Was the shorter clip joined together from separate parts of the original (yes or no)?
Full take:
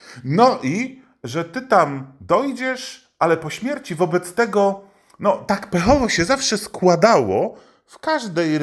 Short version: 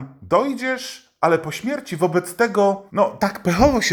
yes